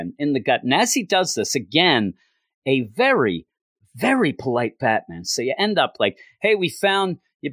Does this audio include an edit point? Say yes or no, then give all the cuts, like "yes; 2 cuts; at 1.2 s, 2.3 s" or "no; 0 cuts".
no; 0 cuts